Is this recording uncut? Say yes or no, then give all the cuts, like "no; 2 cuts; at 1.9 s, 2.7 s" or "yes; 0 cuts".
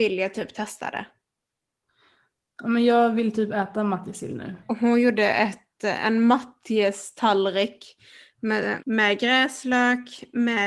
no; 2 cuts; at 4.6 s, 8.8 s